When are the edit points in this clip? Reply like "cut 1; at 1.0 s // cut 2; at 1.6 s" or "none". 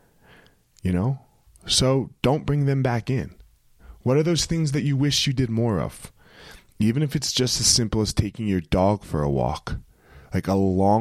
none

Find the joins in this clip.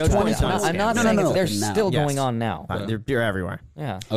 cut 1; at 1.3 s // cut 2; at 2.7 s

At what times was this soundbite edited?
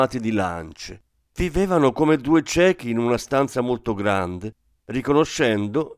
cut 1; at 1.2 s

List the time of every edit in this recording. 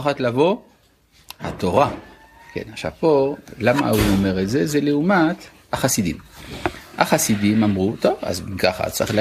none

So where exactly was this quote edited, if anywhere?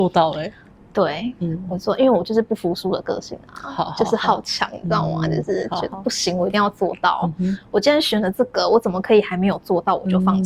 none

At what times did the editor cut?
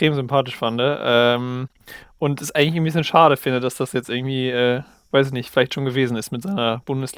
none

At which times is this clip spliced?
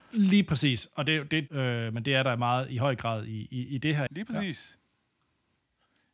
cut 1; at 1.5 s // cut 2; at 4.1 s

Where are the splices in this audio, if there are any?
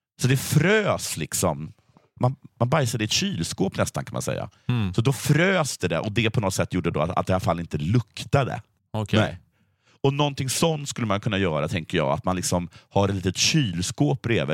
cut 1; at 8.8 s

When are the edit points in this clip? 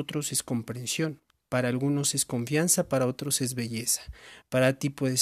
none

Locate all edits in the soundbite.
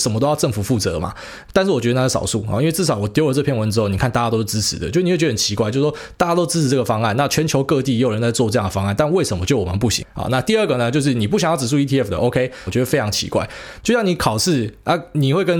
cut 1; at 10.0 s // cut 2; at 12.7 s // cut 3; at 13.8 s

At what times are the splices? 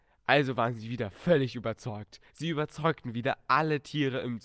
cut 1; at 2.3 s

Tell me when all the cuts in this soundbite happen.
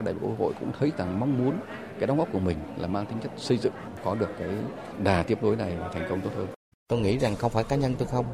cut 1; at 6.7 s

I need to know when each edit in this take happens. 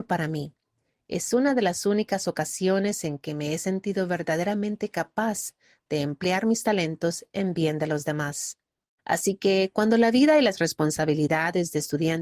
cut 1; at 9.0 s

